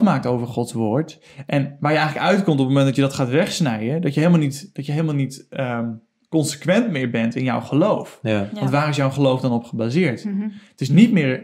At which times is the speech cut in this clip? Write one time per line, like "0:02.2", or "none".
none